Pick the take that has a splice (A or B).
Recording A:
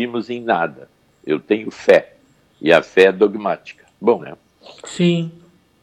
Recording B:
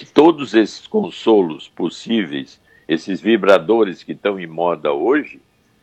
A